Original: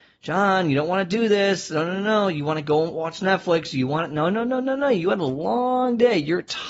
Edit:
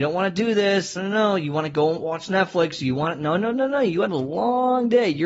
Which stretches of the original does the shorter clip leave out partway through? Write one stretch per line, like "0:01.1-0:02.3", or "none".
0:01.7-0:01.9
0:04.5-0:04.6